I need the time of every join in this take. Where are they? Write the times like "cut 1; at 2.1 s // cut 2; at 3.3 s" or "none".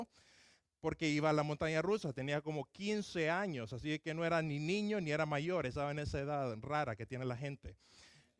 none